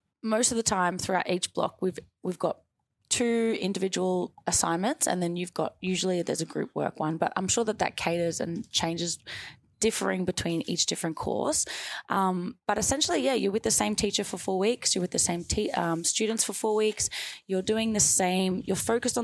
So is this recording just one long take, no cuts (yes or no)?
yes